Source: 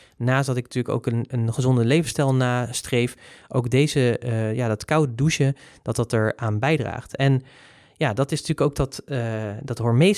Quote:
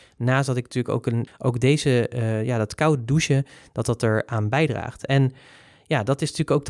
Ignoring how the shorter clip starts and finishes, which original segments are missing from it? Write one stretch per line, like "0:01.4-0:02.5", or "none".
0:01.3-0:03.4